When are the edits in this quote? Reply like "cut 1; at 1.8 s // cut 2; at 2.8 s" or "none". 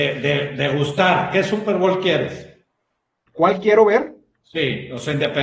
none